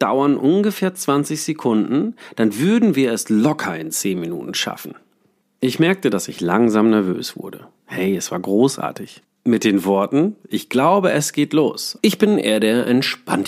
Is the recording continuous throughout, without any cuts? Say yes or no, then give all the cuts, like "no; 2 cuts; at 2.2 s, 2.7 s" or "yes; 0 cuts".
no; 3 cuts; at 9.2 s, 10.4 s, 12.0 s